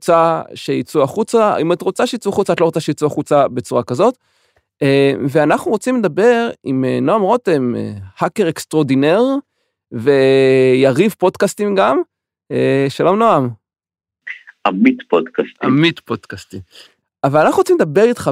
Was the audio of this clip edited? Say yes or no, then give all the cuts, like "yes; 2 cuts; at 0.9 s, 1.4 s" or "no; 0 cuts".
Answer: no; 0 cuts